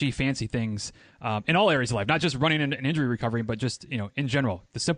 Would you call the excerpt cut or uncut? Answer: uncut